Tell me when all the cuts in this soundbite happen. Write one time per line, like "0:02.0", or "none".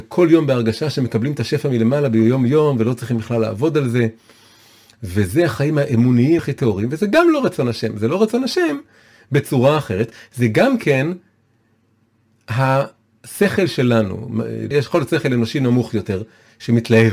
0:06.4
0:14.7